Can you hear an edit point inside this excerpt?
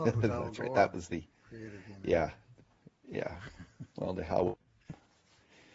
no; 0 cuts

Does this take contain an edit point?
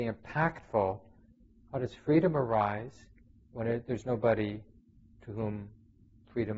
no; 0 cuts

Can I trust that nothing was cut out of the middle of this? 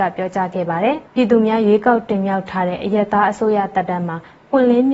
no; 1 cut; at 1.1 s

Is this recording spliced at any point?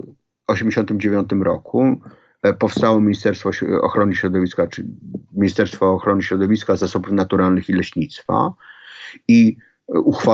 no; 0 cuts

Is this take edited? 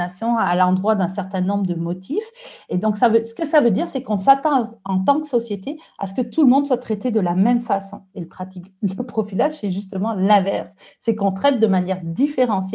no; 0 cuts

